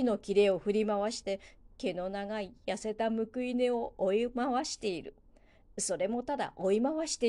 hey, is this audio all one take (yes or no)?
yes